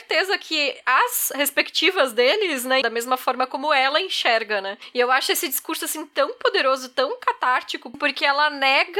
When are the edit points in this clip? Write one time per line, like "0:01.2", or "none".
0:02.8